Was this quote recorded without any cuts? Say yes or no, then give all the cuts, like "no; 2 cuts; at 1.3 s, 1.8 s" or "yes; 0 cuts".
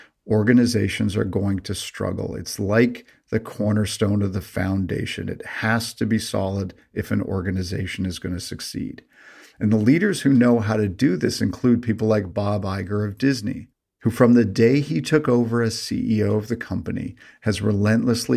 yes; 0 cuts